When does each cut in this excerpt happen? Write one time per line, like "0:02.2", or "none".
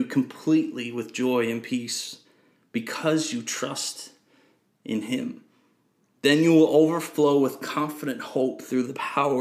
none